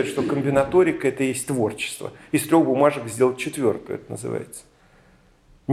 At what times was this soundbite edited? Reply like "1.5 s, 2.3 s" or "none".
none